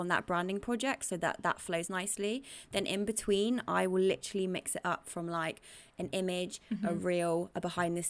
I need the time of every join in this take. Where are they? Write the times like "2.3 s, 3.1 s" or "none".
none